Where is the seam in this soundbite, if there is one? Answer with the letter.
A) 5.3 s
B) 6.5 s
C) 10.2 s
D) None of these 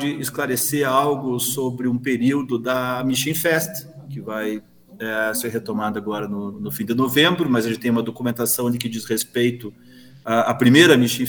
B